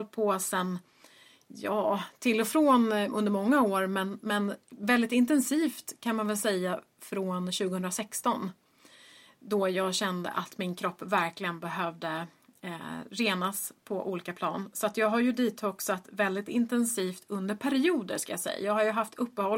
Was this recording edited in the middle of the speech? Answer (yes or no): no